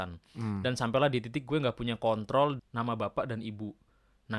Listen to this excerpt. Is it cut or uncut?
cut